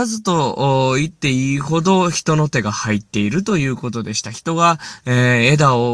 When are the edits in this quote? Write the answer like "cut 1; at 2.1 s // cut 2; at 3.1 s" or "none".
none